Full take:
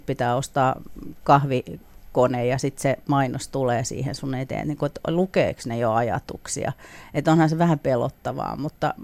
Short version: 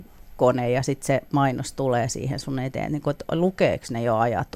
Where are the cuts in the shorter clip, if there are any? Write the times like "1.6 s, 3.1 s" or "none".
none